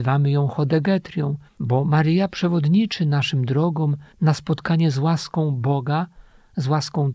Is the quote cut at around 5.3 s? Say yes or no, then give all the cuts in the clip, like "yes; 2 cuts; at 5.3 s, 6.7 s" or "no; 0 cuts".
no; 2 cuts; at 1.5 s, 4.1 s